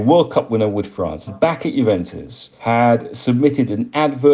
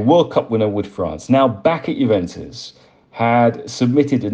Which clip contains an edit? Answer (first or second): first